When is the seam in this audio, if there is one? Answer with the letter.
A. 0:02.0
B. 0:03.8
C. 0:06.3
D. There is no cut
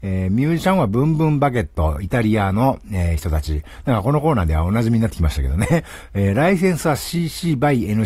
D